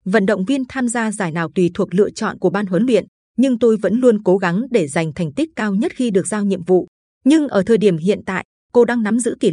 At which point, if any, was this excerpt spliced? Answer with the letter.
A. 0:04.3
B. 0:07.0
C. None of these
B